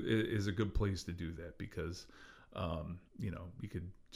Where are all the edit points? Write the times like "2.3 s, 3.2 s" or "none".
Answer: 3.1 s